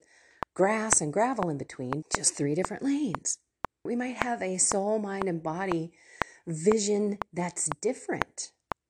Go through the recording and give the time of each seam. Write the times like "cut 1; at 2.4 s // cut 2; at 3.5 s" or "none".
cut 1; at 2.0 s // cut 2; at 3.9 s